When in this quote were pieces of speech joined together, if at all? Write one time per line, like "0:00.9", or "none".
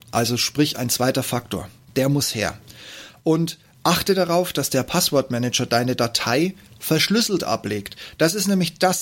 none